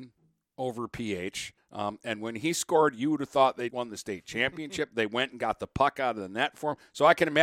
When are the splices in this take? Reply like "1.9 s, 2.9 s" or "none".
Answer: 1.6 s, 3.7 s